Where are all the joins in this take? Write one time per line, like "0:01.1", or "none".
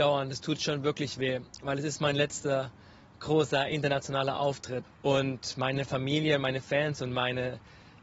none